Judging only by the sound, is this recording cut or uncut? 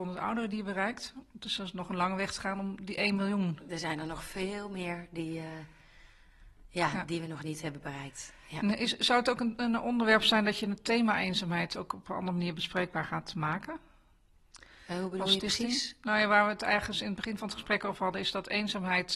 uncut